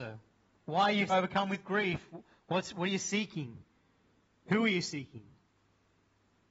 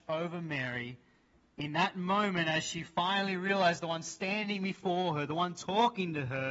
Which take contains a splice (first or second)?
first